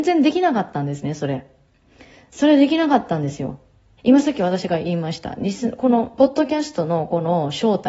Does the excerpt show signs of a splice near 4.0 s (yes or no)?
yes